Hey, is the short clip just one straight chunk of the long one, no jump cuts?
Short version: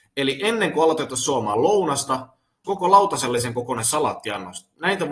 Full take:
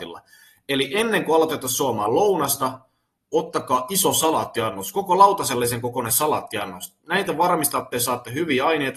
no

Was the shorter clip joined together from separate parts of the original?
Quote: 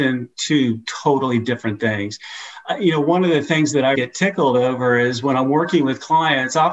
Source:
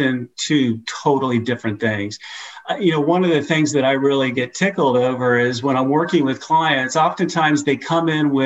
yes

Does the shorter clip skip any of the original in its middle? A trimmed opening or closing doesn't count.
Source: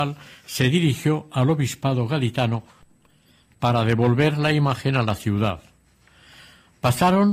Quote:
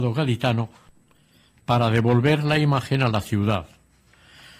no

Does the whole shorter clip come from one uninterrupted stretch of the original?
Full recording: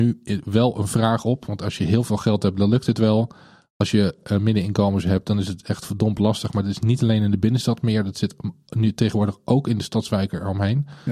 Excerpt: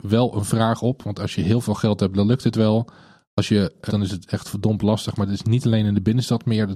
no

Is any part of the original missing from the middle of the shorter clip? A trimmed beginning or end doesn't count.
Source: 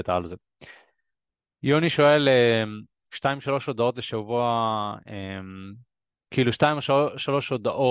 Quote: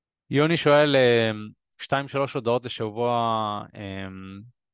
no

